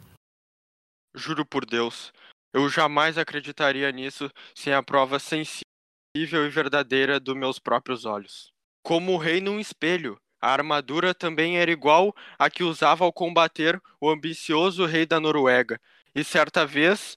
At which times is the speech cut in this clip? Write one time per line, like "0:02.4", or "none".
0:08.6